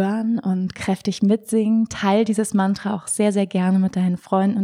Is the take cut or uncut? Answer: uncut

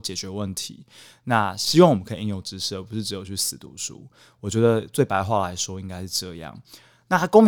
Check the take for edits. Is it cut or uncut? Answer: uncut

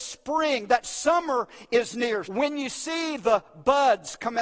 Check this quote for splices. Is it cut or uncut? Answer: cut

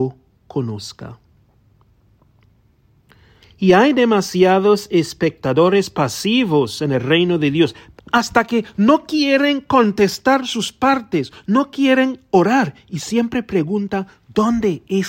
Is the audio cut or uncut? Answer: cut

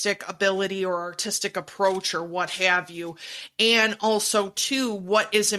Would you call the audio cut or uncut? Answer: uncut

